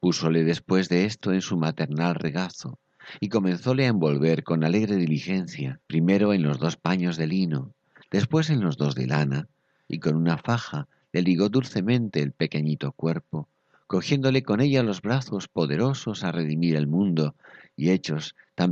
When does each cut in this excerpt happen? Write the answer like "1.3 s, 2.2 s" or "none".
5.8 s